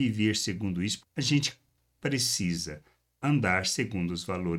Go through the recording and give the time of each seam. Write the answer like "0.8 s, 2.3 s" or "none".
1.0 s